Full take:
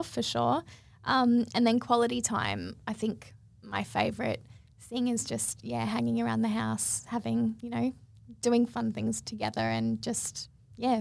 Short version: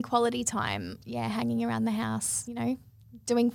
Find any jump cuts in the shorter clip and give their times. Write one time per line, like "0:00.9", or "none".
0:01.0
0:02.4